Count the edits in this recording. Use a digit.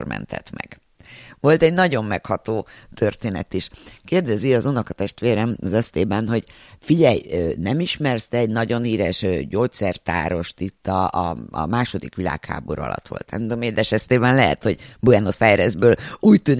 0